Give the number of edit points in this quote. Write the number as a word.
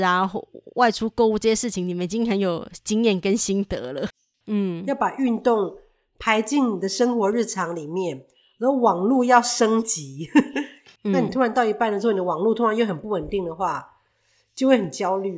two